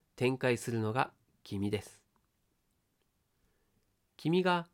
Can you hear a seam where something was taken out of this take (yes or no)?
no